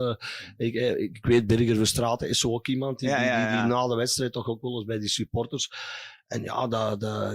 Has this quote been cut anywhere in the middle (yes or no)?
no